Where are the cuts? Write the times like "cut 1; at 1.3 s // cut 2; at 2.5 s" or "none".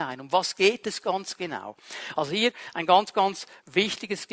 cut 1; at 2.1 s